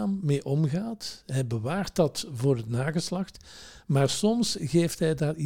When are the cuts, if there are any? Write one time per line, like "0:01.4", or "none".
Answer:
none